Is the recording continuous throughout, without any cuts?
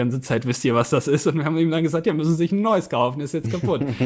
yes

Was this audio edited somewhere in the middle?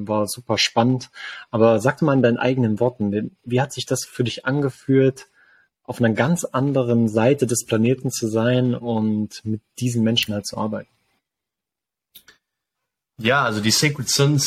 yes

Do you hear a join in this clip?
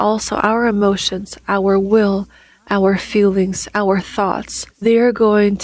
yes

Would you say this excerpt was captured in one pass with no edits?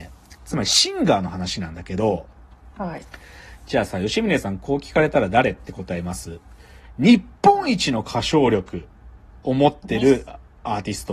yes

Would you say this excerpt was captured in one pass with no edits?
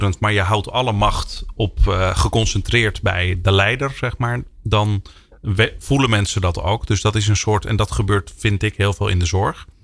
yes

